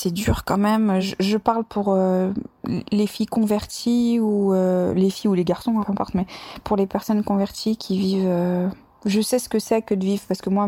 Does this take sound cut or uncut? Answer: cut